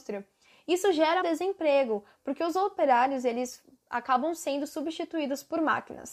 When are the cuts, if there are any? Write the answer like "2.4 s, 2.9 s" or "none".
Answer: 1.2 s